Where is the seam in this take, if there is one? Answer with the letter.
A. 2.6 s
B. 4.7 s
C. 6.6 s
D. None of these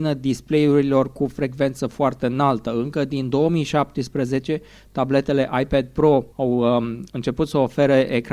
D